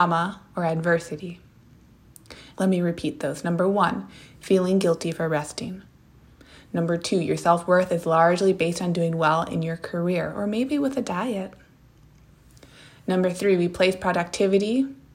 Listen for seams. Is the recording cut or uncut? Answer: cut